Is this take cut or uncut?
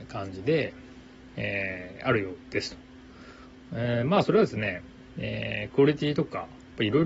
uncut